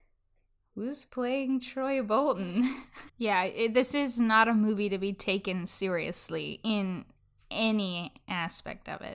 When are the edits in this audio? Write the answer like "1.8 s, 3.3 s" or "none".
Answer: 3.1 s